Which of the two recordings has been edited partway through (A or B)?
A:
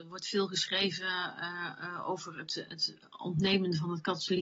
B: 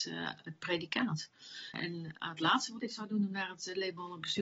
B